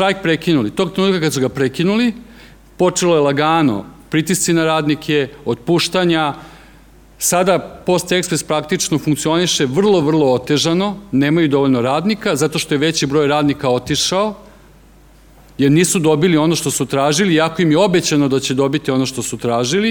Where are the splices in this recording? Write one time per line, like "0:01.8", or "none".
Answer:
0:10.0